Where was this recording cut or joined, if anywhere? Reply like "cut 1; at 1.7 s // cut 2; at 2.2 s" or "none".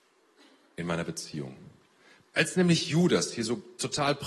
cut 1; at 2.2 s